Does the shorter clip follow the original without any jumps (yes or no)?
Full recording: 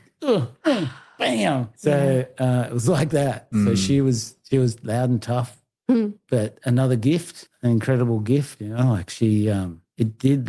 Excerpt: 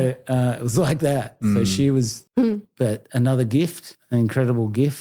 no